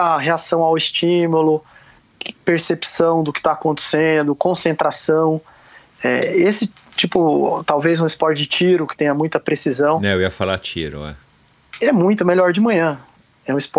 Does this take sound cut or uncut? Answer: uncut